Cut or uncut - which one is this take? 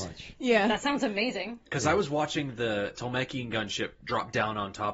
uncut